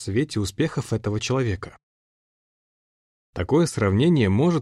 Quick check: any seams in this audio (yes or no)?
no